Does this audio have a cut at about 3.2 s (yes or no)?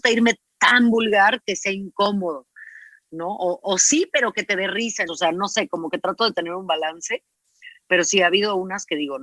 no